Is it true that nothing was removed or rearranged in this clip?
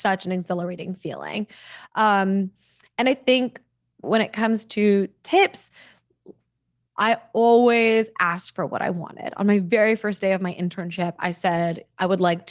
no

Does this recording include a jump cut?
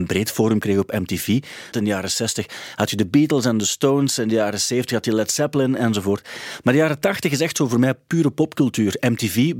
yes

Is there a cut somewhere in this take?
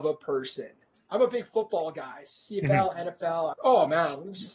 yes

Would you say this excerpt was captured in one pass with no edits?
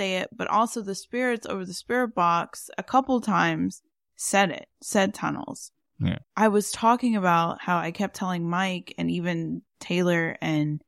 no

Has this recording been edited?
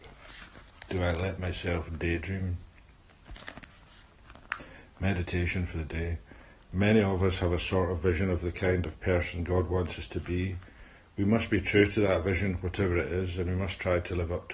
no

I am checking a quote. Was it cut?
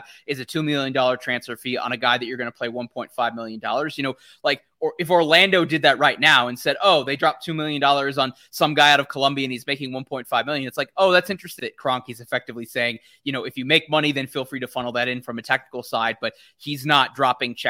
yes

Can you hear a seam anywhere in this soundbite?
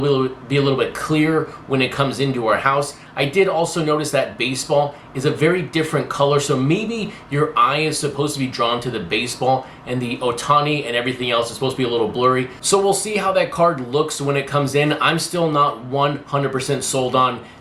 no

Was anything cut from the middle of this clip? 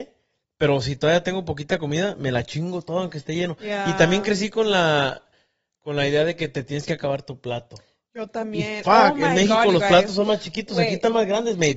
no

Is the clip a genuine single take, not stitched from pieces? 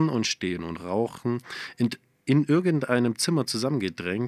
yes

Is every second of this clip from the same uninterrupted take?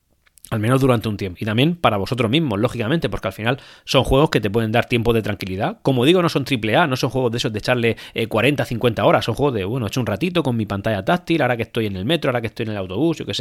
no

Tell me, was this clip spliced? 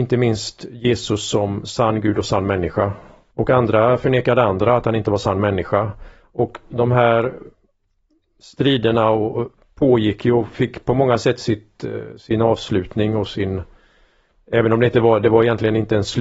yes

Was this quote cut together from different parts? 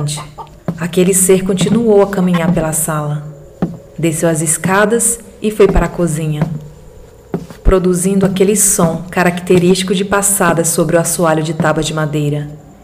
yes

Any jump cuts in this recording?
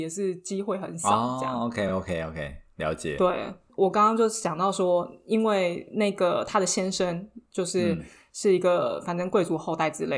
no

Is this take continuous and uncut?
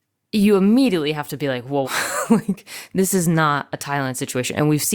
no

